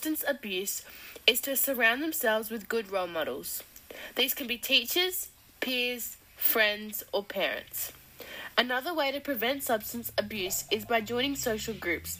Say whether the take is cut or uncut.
uncut